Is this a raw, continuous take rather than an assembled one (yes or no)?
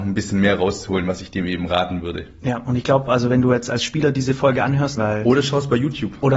no